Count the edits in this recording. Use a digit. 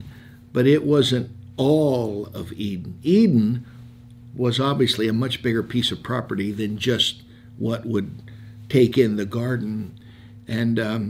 0